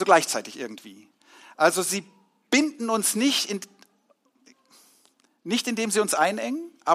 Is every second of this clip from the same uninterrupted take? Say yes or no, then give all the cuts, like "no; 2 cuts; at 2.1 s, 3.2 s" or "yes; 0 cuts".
yes; 0 cuts